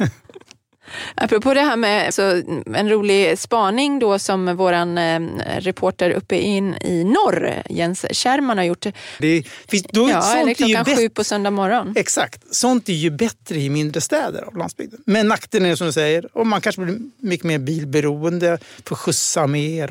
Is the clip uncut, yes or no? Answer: no